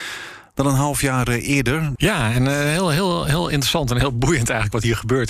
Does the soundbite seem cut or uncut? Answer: cut